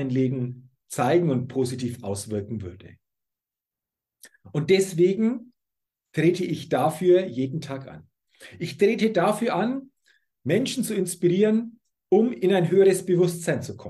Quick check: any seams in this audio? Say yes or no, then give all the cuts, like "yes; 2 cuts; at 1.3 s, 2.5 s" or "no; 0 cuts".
no; 0 cuts